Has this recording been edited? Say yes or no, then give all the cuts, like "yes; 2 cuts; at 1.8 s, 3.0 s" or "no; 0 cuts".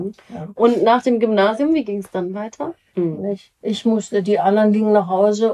yes; 1 cut; at 2.9 s